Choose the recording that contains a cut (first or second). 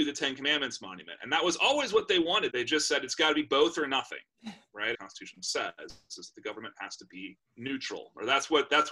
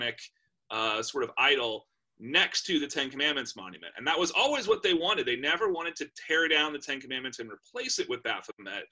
first